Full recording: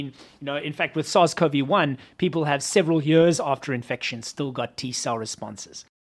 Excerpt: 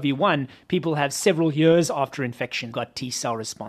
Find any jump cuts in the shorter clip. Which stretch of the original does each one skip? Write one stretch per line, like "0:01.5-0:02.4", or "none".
0:04.2-0:04.5